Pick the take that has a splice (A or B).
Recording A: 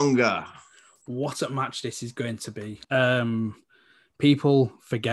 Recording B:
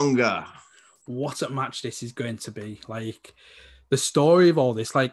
A